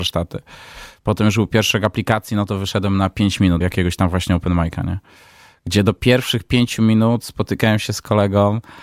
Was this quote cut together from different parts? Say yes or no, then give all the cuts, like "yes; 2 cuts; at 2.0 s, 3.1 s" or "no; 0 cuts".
yes; 1 cut; at 3.6 s